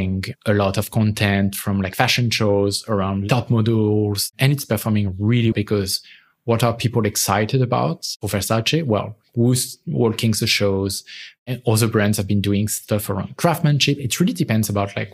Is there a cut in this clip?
yes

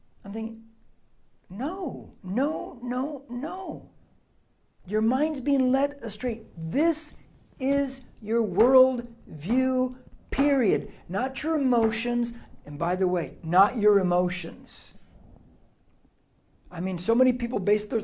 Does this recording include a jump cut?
no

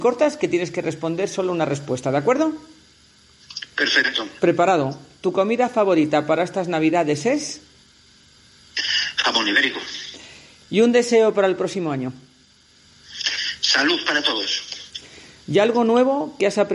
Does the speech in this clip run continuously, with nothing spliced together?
yes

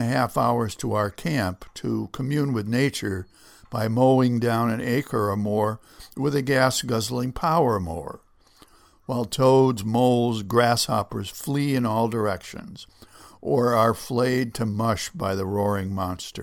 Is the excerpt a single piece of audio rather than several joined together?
yes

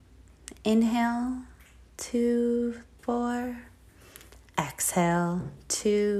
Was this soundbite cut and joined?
yes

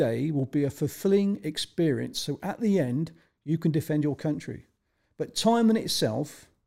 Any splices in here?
no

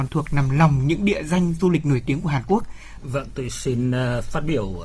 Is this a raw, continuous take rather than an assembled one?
no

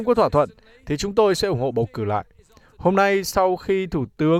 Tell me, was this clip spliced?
no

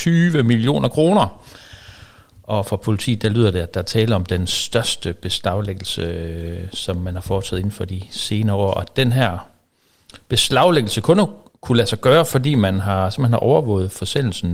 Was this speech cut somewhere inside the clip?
no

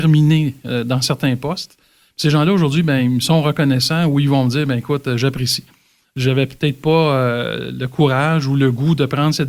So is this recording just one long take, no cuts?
yes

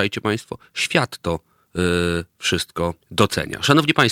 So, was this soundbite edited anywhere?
yes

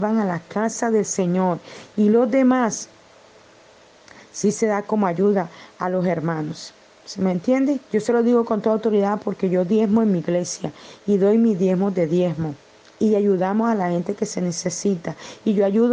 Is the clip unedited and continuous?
no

